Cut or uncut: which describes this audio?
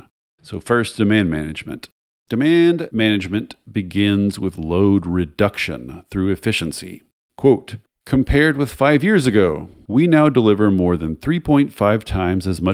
cut